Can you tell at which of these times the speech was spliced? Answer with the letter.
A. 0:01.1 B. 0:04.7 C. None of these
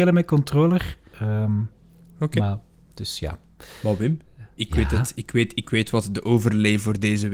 A